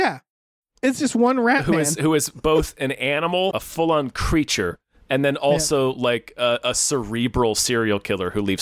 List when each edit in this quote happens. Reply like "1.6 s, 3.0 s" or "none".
3.5 s